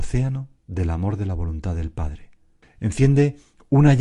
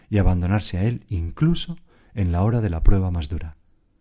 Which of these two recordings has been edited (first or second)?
first